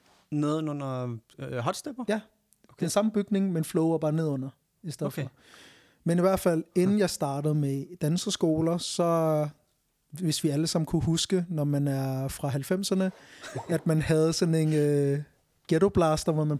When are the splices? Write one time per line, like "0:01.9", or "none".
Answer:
none